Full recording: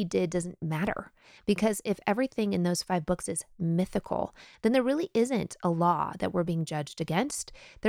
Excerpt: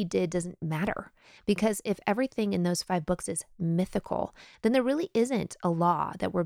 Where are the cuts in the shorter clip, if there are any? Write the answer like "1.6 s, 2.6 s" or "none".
none